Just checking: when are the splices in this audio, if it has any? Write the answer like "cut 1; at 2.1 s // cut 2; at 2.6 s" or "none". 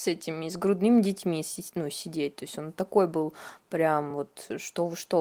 none